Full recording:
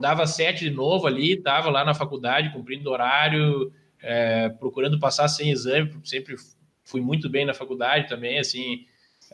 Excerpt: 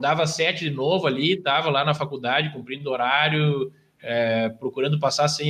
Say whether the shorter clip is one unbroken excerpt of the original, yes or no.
yes